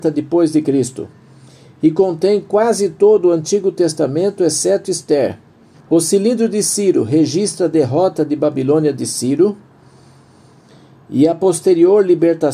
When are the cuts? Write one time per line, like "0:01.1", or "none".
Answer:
0:05.7